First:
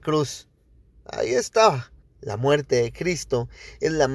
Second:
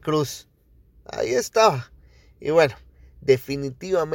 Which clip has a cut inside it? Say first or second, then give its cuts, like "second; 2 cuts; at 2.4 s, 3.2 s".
first; 1 cut; at 2.0 s